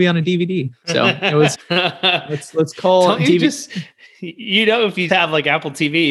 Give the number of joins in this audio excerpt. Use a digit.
2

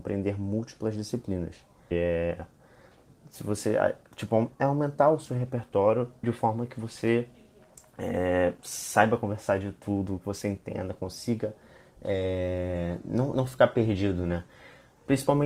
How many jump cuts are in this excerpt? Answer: 2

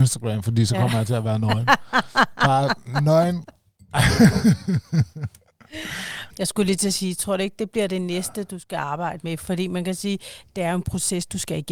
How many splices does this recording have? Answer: 1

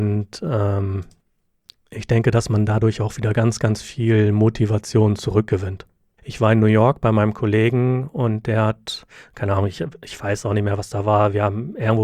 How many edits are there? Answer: 1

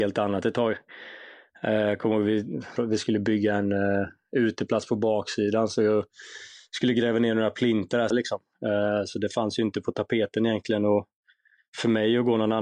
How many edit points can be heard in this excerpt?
2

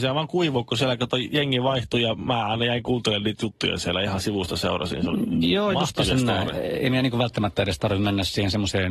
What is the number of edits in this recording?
0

